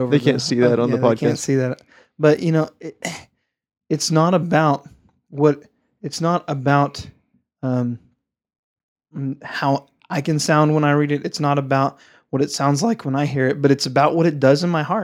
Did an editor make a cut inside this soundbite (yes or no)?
no